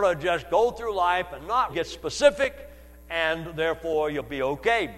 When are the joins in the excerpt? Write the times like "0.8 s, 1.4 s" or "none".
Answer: 1.7 s

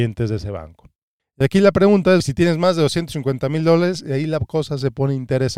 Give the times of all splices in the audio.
1.2 s, 2.2 s

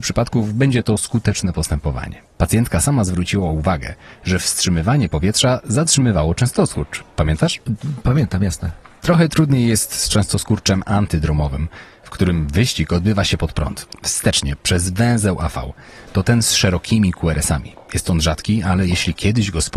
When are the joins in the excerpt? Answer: none

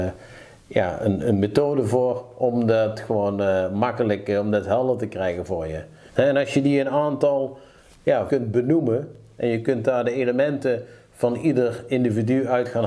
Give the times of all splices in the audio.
6.1 s, 8.3 s

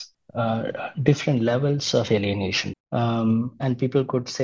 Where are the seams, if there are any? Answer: 2.7 s

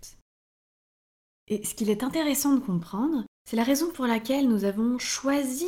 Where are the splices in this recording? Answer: none

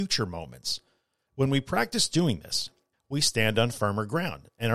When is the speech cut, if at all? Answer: 1.3 s, 2.9 s

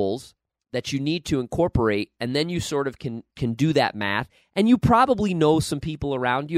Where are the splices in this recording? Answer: 3.3 s

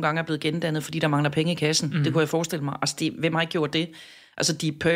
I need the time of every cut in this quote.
none

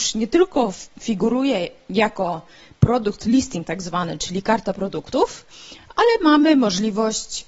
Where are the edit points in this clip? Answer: none

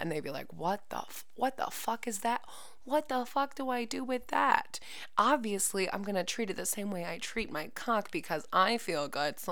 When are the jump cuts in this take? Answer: none

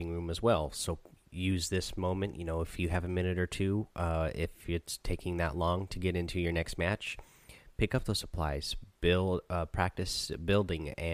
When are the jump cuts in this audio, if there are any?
none

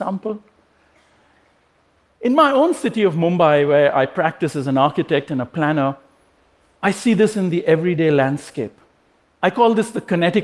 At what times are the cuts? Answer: none

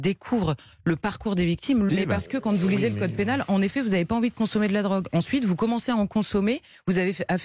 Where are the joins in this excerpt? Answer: 1.9 s

